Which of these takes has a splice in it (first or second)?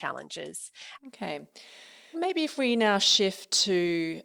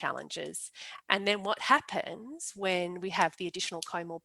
first